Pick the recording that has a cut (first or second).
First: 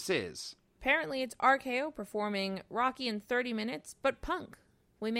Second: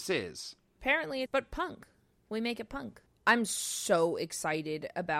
second